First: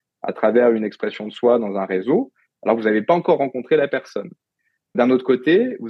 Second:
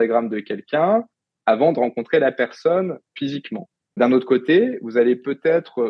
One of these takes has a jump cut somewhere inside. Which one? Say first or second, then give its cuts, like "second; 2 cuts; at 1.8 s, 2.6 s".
second; 1 cut; at 3.9 s